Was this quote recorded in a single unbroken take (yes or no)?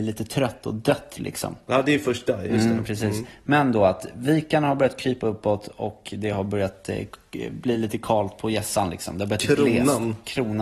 yes